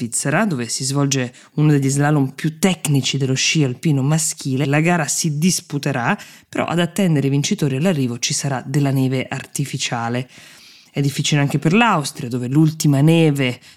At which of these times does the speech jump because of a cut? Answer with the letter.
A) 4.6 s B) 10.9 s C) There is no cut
A